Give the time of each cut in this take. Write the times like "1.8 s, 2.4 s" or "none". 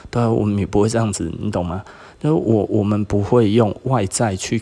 none